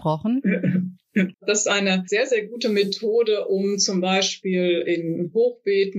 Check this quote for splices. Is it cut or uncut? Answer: cut